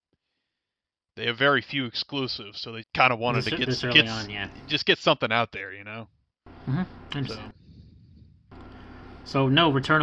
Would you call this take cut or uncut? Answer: cut